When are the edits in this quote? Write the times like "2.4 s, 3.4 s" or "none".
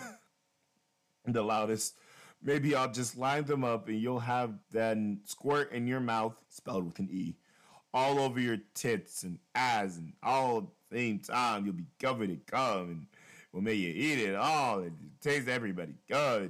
4.6 s, 6.4 s, 12.4 s